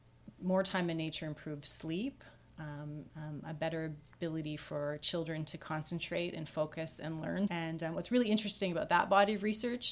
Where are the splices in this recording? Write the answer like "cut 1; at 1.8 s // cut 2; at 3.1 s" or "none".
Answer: cut 1; at 3.1 s // cut 2; at 7.5 s